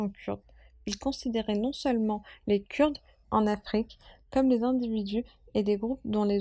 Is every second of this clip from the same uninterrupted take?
no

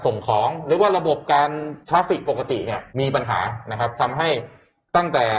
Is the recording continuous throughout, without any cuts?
no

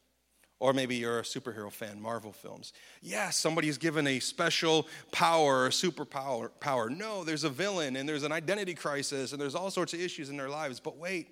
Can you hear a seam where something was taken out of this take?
no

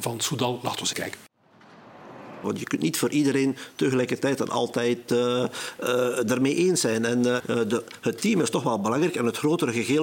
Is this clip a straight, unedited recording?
no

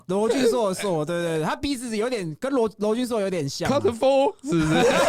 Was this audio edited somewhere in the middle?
no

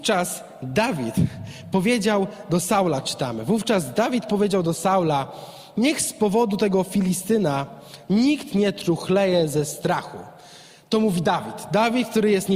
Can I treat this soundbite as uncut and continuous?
yes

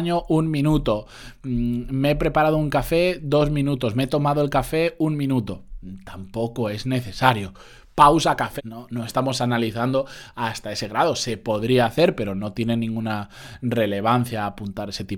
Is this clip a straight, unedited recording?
no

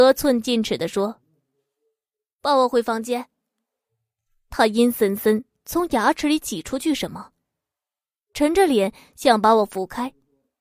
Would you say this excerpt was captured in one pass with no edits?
yes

